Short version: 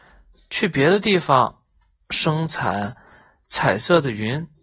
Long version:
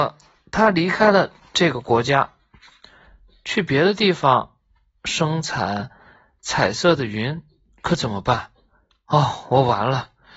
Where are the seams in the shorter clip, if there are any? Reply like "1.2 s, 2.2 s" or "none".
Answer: none